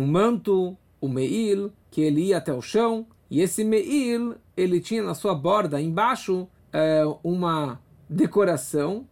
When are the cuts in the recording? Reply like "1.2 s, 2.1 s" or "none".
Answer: none